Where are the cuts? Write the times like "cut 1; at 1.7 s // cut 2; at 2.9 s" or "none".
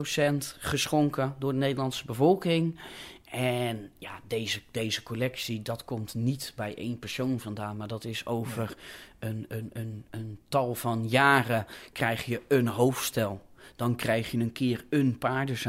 none

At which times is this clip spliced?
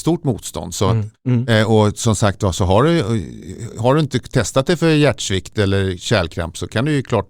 cut 1; at 1.1 s

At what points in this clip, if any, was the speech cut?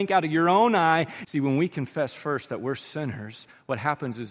cut 1; at 1.2 s

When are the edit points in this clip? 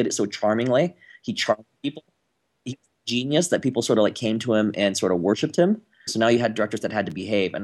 cut 1; at 6.1 s

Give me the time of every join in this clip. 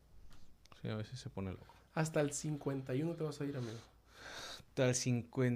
none

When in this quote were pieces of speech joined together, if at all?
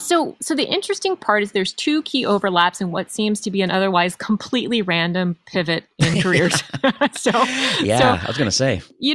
none

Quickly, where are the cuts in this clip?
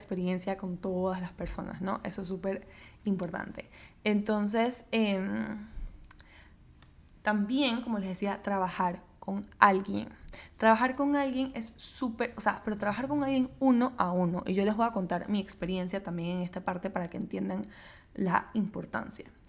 none

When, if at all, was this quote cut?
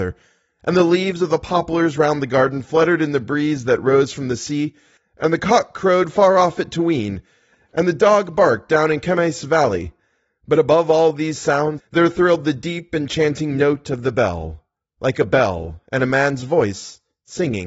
cut 1; at 11.8 s

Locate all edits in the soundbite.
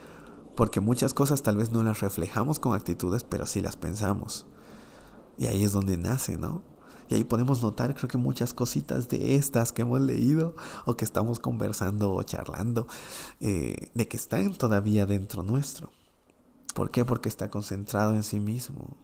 cut 1; at 16.7 s

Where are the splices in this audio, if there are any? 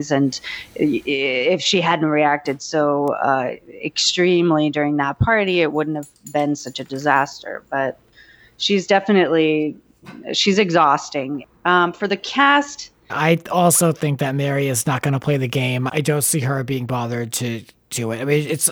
cut 1; at 13.1 s // cut 2; at 15.9 s

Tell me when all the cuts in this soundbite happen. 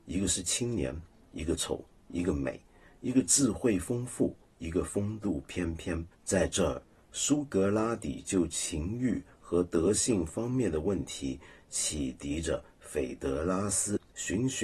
cut 1; at 6.1 s

